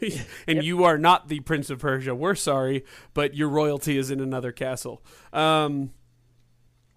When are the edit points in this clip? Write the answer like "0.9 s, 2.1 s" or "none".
none